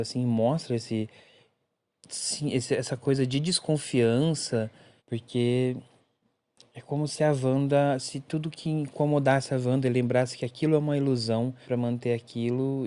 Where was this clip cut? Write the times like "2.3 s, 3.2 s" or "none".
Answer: 5.0 s, 11.6 s